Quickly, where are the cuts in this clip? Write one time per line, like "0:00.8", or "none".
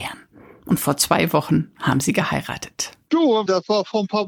0:03.1